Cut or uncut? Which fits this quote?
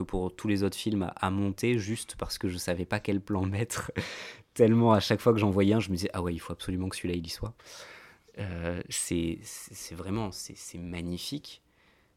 uncut